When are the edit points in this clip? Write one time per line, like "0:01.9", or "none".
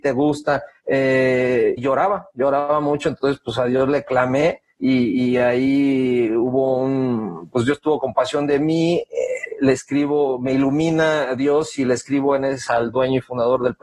0:01.8
0:12.7